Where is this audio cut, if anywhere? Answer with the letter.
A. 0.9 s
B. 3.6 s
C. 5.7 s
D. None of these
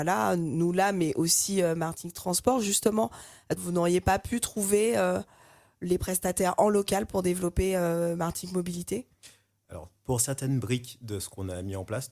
B